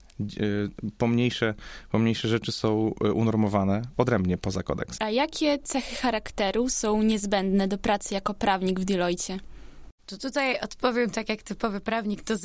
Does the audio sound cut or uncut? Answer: cut